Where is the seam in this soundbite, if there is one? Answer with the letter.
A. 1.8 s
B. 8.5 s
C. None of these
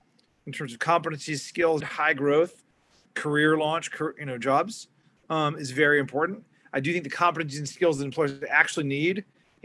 A